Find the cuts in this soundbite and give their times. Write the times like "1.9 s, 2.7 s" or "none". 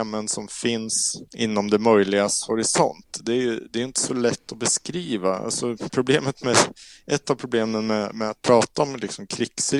1.3 s